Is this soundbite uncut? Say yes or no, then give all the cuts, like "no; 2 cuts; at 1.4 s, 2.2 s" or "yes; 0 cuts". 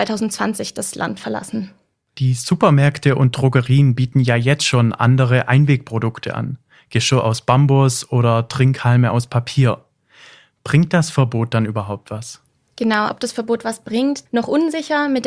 no; 2 cuts; at 13.1 s, 14.3 s